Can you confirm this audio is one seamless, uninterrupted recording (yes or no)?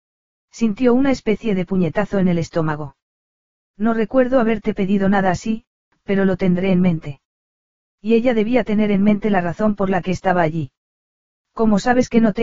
yes